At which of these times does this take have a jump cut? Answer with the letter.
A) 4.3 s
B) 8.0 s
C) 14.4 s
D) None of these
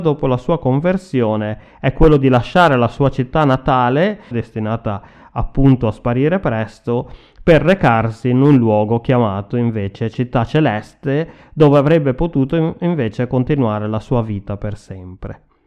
A